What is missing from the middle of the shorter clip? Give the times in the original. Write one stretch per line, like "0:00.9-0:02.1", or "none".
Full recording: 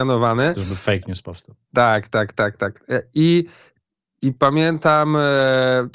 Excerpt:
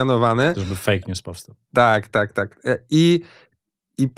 0:02.1-0:02.3